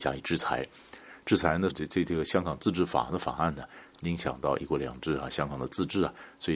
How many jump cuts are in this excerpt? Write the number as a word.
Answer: two